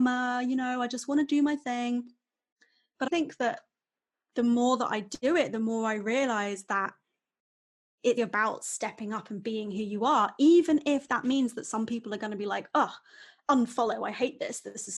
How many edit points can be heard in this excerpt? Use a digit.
2